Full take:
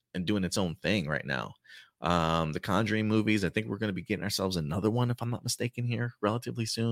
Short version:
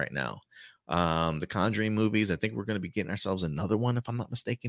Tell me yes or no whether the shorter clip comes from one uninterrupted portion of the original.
yes